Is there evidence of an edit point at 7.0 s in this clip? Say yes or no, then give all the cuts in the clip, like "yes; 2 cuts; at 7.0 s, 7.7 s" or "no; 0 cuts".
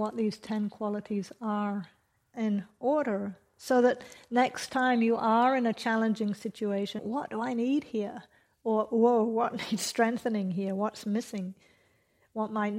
yes; 1 cut; at 7.0 s